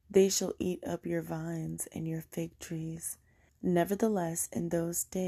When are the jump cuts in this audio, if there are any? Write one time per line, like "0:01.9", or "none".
0:03.5